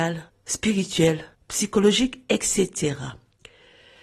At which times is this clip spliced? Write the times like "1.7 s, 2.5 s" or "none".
none